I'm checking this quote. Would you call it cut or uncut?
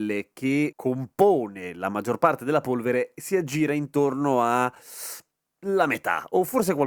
uncut